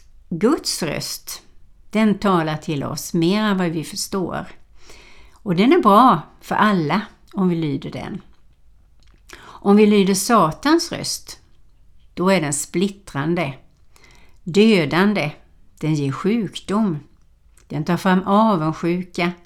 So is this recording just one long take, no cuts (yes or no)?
yes